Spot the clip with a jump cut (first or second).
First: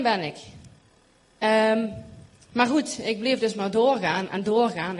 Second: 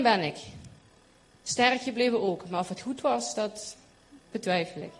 first